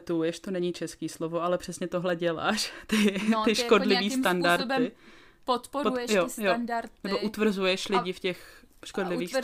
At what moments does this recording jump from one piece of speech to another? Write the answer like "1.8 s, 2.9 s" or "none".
none